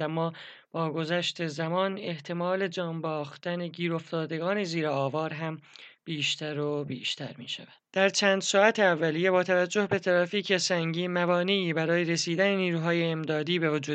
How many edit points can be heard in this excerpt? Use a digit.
1